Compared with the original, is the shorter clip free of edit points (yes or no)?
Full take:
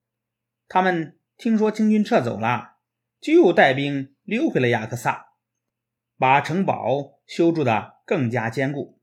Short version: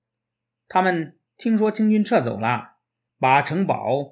no